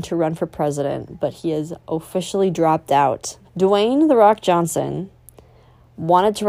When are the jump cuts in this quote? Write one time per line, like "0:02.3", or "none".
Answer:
0:03.4